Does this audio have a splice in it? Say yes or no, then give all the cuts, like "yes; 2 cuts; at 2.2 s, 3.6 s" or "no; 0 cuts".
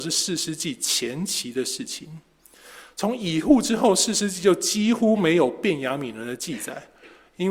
yes; 1 cut; at 2.9 s